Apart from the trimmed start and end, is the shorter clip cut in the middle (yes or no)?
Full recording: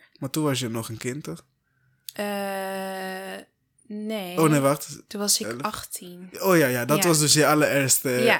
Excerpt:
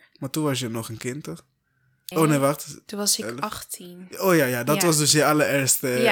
yes